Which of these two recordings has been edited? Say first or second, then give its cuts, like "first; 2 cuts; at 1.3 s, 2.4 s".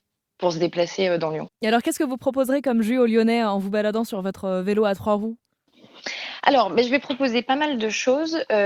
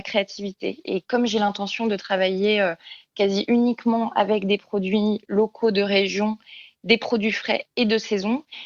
first; 1 cut; at 1.5 s